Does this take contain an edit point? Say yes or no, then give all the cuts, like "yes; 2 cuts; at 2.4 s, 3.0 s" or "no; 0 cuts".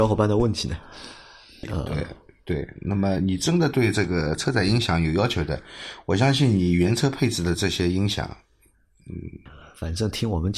yes; 2 cuts; at 1.6 s, 9.5 s